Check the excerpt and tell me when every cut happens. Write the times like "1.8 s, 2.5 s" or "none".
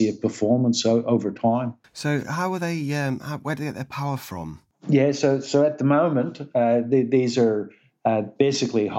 1.8 s